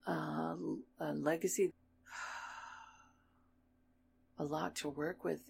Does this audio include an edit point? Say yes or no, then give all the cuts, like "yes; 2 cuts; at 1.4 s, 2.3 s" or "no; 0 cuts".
yes; 1 cut; at 1.7 s